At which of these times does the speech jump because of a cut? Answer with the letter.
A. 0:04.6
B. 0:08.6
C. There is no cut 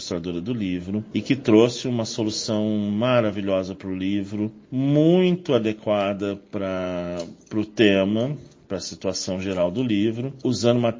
C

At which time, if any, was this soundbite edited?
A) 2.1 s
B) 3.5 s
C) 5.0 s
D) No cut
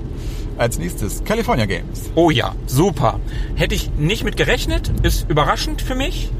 C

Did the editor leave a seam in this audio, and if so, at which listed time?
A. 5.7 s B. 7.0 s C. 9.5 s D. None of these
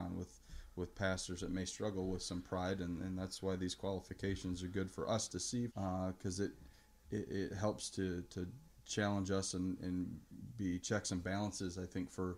A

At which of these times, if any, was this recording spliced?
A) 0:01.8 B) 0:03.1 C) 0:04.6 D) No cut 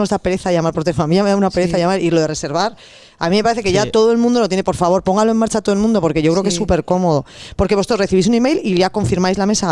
D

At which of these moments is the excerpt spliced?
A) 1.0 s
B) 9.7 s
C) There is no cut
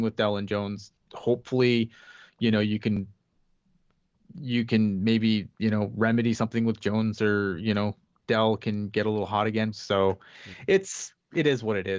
B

